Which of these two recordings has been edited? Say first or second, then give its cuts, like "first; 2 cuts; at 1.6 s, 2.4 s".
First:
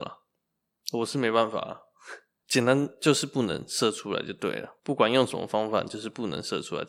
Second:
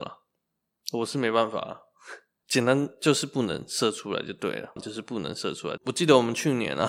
second; 2 cuts; at 4.8 s, 5.8 s